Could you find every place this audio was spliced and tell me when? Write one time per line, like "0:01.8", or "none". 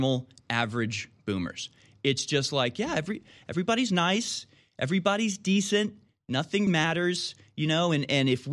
0:06.7